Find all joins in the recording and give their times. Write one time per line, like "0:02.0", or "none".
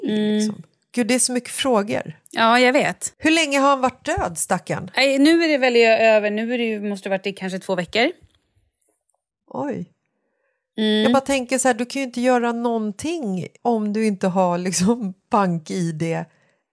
0:13.6

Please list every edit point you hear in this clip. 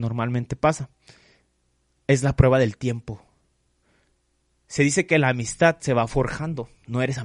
none

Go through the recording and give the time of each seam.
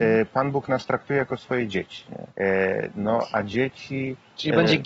0:02.3

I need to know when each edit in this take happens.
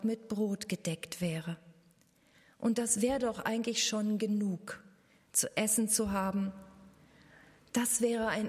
none

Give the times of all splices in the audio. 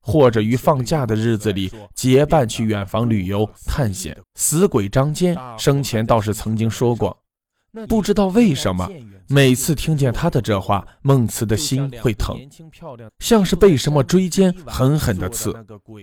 0:04.2
0:07.9
0:13.1

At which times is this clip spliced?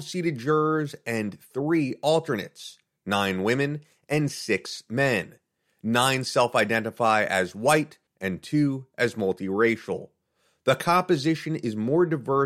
0:08.1

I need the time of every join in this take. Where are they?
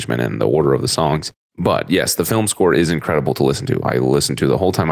none

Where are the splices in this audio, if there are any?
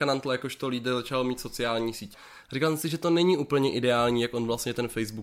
0:02.1

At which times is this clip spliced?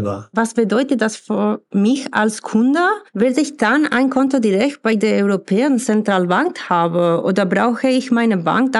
0:03.1

